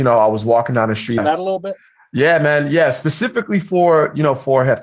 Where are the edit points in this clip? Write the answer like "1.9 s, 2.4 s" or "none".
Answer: 1.2 s